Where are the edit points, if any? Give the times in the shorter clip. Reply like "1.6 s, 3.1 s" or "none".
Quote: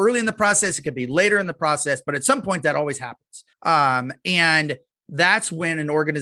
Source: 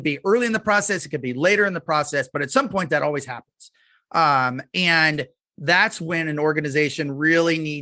3.5 s